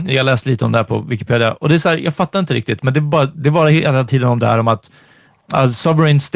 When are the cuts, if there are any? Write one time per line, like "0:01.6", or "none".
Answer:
none